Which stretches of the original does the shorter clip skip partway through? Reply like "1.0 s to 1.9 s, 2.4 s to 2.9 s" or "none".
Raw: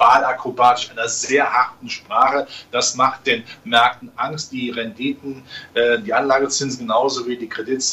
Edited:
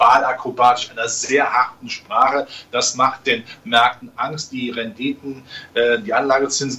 none